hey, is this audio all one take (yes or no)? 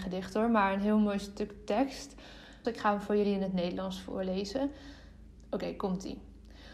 no